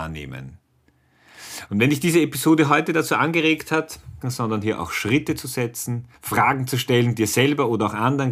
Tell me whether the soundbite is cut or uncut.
cut